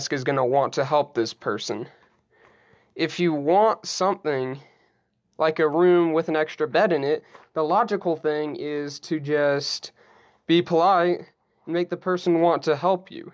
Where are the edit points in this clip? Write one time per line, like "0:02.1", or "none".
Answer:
none